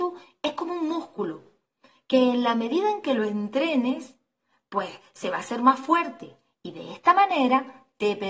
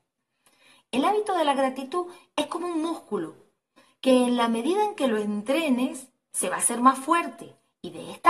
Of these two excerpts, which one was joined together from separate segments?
second; 1 cut; at 6.3 s

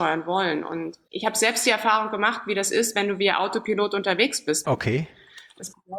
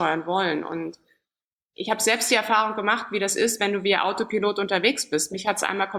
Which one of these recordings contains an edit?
first; 2 cuts; at 1.1 s, 4.6 s

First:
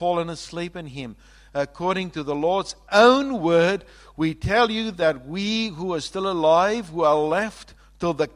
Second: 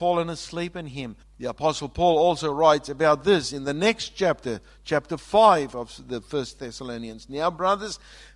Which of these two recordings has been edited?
second; 1 cut; at 1.2 s

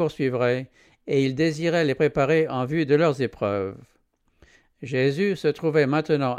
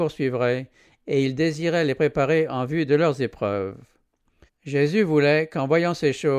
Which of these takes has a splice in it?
second; 1 cut; at 4.5 s

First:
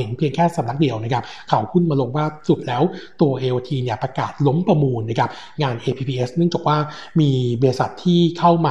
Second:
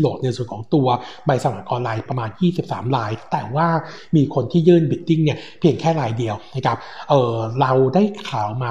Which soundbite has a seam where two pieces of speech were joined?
second; 1 cut; at 2.1 s

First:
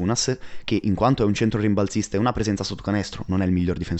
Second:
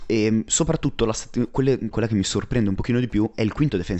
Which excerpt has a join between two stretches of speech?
second; 1 cut; at 1.9 s

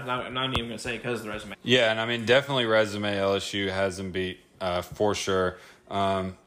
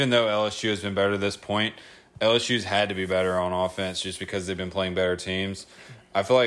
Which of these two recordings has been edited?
first; 1 cut; at 1.5 s

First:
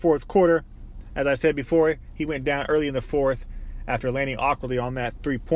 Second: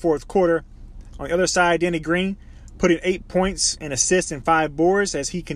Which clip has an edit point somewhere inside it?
second; 1 cut; at 1.1 s

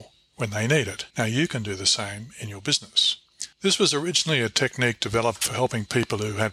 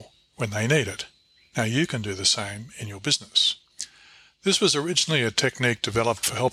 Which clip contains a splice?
first; 2 cuts; at 1.1 s, 3.5 s

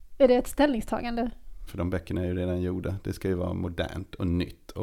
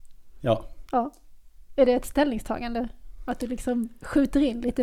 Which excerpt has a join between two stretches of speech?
first; 1 cut; at 1.7 s

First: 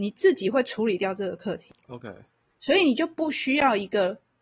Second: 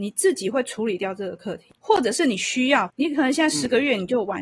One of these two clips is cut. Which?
second; 2 cuts; at 1.8 s, 2.9 s

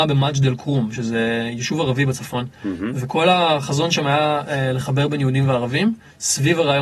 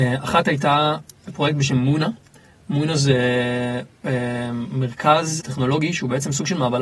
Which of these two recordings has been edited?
second; 1 cut; at 5.4 s

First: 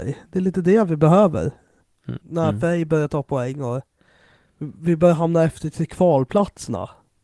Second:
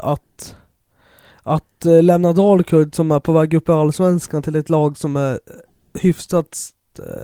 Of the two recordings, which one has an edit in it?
first; 1 cut; at 2.2 s

